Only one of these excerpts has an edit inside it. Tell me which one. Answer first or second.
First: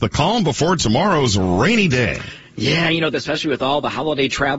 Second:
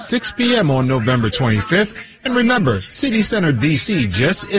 first